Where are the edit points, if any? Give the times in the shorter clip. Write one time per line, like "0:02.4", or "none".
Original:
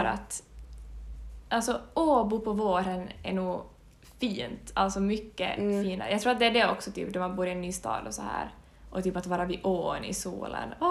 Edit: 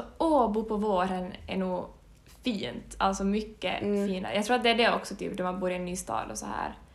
none